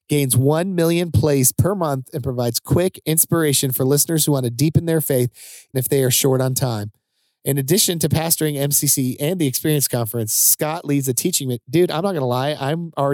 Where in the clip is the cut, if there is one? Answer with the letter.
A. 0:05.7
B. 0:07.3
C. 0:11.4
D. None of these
A